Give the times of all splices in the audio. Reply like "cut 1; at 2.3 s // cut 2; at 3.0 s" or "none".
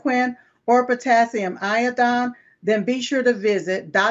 none